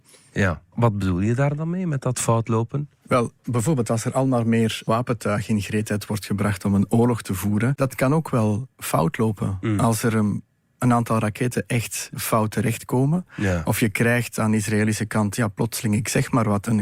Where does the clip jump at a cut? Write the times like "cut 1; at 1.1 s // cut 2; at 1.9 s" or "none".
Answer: cut 1; at 7.8 s